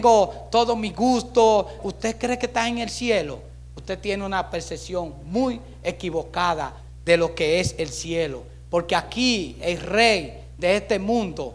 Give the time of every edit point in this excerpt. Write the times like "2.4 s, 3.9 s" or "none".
1.8 s

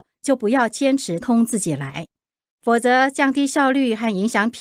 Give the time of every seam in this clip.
1.2 s

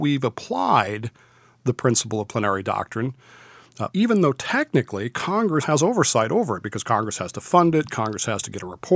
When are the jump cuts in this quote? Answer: 3.9 s, 5.6 s

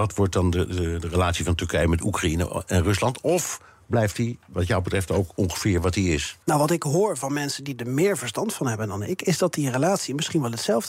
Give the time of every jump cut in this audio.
6.4 s

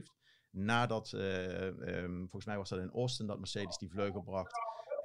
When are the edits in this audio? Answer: none

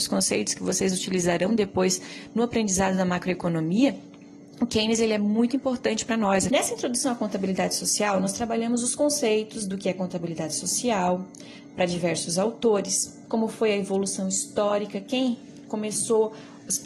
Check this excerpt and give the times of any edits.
6.5 s, 13.3 s

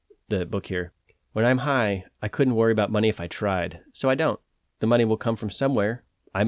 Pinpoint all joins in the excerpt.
none

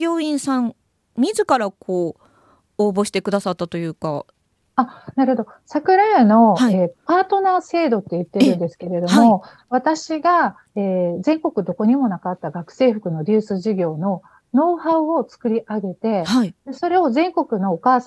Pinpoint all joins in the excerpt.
none

